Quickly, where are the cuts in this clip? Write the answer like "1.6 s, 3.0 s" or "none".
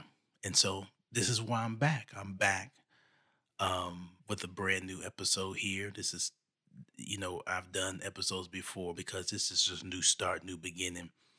4.2 s, 9.0 s